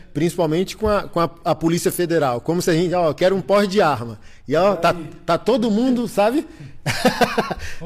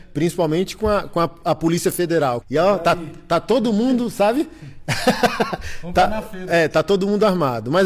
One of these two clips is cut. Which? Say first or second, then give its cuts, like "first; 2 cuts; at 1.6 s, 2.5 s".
second; 1 cut; at 2.4 s